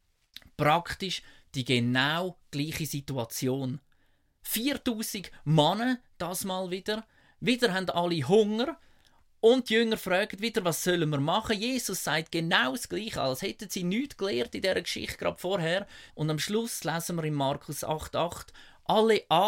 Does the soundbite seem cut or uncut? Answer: cut